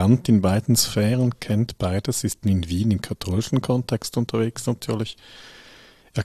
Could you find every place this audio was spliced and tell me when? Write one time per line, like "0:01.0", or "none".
0:02.4

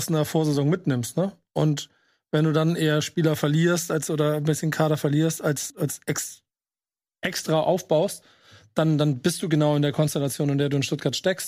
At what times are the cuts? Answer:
0:05.7

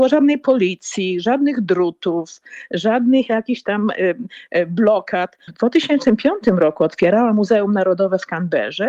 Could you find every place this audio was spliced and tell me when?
0:05.5

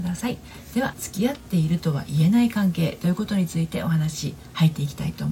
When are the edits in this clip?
0:00.9

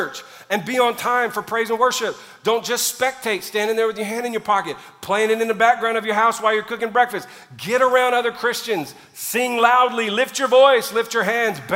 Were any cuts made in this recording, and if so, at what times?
none

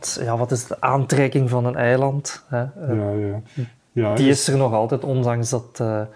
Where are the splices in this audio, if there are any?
none

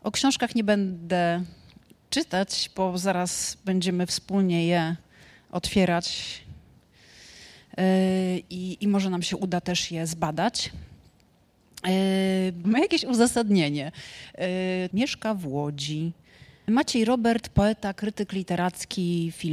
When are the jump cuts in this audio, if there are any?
0:12.6
0:14.9
0:16.7

